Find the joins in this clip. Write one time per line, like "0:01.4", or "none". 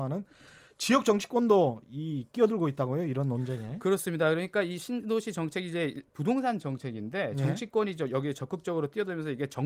none